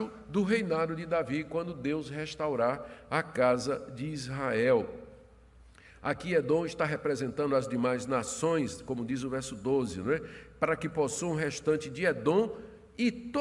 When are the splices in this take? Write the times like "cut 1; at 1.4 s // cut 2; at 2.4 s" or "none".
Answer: none